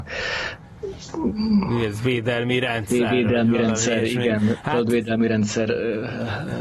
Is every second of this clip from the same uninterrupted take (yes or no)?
yes